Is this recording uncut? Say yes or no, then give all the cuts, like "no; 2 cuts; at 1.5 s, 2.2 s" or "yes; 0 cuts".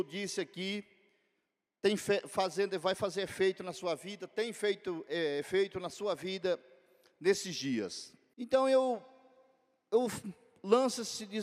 no; 1 cut; at 8.3 s